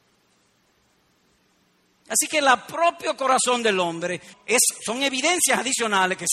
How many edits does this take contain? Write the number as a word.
one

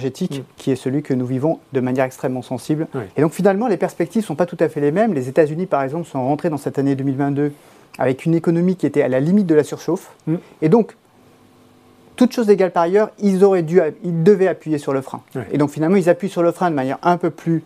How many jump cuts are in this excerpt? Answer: one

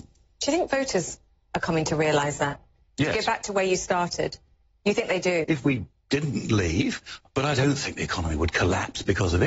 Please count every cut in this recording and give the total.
two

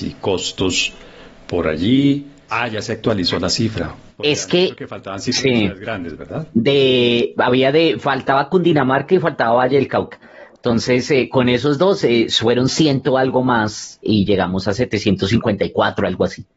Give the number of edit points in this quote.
two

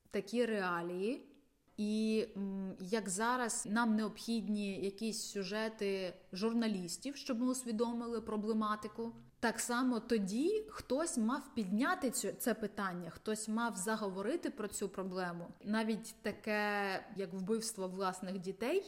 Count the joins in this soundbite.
two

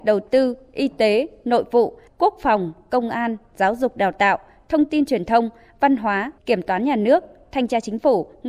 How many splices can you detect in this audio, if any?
two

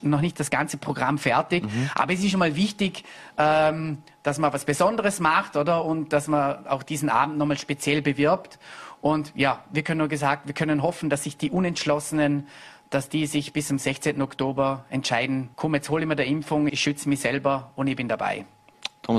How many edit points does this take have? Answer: two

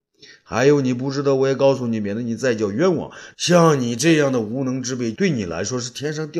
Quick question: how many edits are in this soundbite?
two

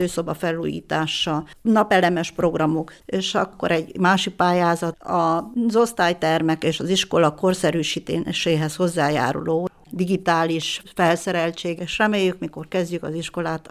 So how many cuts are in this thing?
two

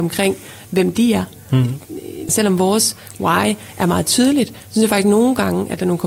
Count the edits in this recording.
one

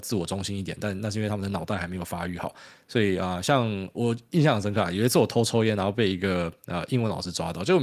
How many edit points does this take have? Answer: one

